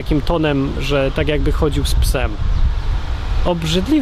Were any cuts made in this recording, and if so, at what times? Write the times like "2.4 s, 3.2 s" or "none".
none